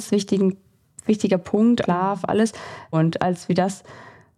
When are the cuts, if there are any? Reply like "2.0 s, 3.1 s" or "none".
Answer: 1.8 s, 2.9 s